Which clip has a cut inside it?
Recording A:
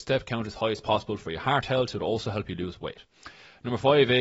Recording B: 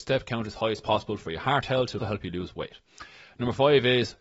B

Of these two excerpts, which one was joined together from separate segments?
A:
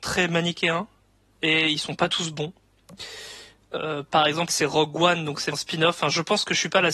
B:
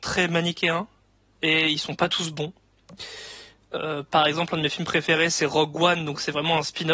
A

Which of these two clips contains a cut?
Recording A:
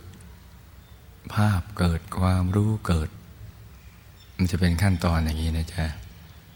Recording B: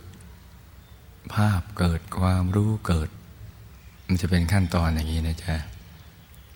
B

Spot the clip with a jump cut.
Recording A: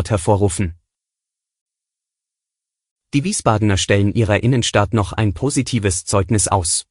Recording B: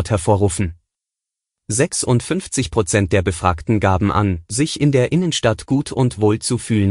B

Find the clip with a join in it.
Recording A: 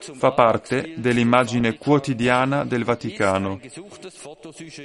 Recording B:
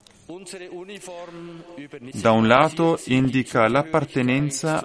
B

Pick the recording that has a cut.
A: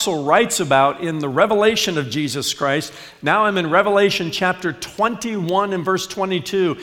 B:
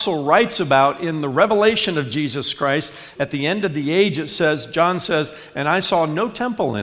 B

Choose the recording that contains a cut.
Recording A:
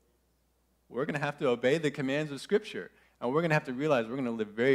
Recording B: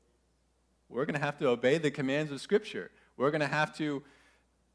A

